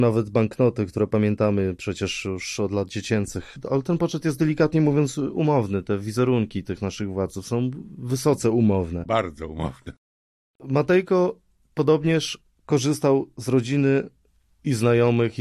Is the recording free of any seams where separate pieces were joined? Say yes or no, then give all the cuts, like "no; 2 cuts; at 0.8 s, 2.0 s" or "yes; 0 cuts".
yes; 0 cuts